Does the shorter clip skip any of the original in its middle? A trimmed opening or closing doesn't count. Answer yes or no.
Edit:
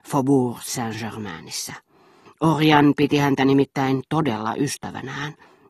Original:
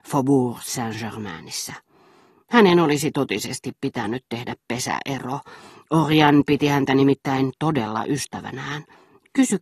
yes